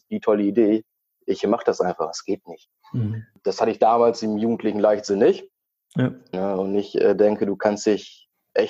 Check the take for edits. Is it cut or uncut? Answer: cut